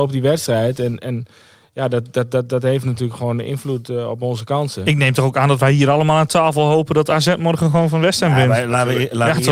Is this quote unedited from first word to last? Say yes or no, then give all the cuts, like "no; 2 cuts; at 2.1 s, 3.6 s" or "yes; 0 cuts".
yes; 0 cuts